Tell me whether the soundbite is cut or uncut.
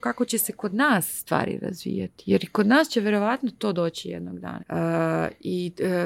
cut